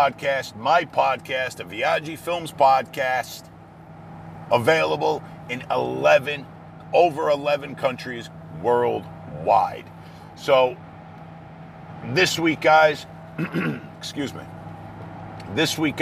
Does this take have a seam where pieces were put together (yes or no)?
no